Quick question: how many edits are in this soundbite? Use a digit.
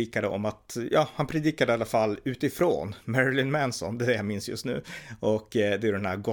0